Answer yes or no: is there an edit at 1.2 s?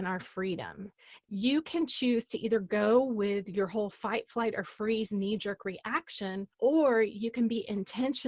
yes